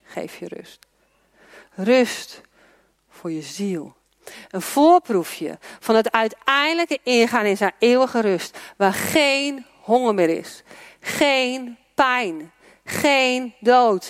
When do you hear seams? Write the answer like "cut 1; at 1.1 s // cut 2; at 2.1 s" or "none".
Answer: none